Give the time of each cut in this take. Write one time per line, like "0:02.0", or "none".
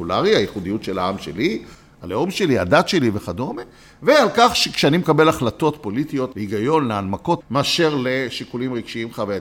0:06.3
0:07.4